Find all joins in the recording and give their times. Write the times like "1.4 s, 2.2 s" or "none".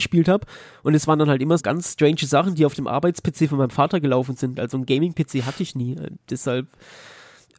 1.6 s